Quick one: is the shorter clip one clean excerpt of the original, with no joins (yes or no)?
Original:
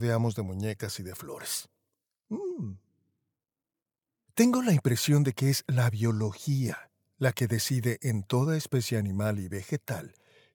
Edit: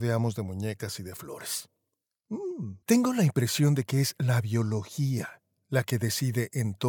no